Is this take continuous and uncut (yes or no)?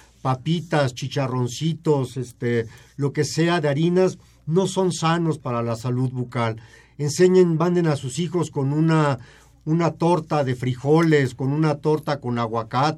yes